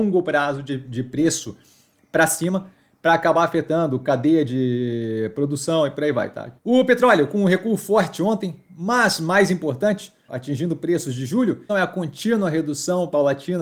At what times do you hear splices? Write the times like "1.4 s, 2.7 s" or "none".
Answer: 6.6 s, 10.3 s, 11.7 s